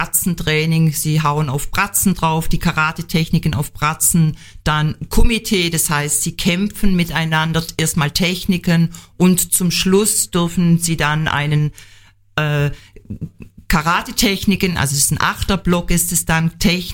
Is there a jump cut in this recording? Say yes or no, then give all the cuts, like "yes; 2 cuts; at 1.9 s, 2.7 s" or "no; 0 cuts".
no; 0 cuts